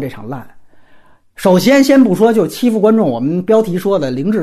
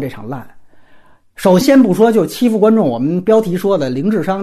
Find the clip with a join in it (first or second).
second